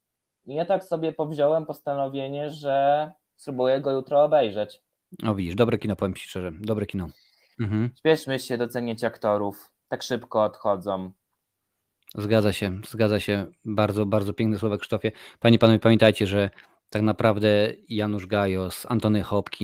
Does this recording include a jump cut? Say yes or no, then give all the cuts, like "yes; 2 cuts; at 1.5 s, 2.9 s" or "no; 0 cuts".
yes; 1 cut; at 7.5 s